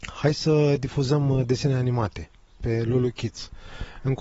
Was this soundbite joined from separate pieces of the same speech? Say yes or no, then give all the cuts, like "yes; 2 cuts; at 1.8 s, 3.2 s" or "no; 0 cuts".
no; 0 cuts